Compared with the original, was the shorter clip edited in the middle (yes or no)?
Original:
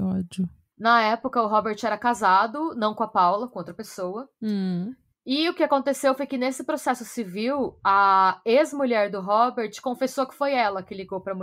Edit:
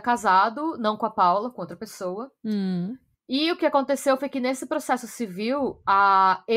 no